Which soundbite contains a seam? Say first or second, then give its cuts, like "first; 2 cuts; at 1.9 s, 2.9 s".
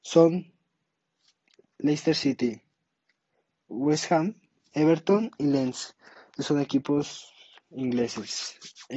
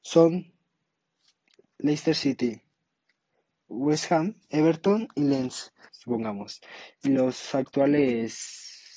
second; 2 cuts; at 4.4 s, 5.9 s